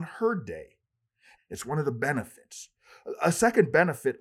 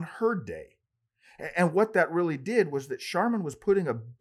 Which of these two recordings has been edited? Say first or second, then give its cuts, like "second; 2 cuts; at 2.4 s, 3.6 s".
first; 1 cut; at 1.3 s